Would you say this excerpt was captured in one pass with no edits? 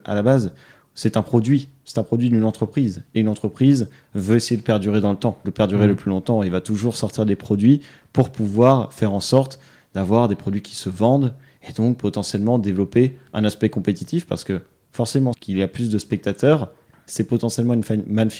no; 2 cuts; at 5.4 s, 15.3 s

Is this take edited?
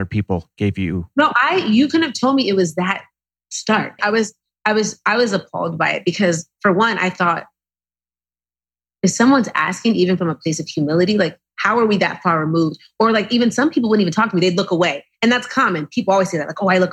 yes; 1 cut; at 4.0 s

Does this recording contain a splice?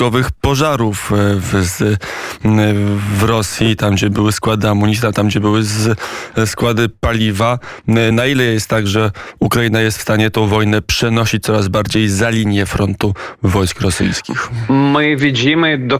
no; 0 cuts

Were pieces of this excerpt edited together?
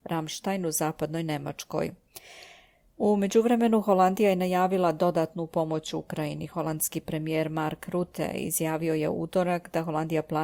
no; 0 cuts

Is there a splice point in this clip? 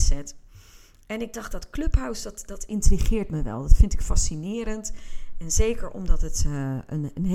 no; 0 cuts

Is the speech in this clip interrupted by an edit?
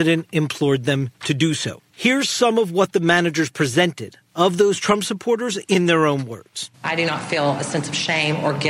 yes; 1 cut; at 6.7 s

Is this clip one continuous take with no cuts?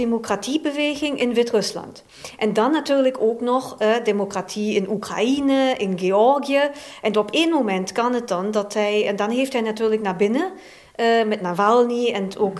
yes; 0 cuts

